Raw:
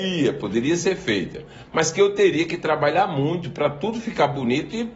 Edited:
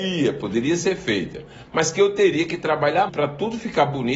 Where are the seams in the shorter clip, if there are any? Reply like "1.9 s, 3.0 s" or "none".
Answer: 3.1 s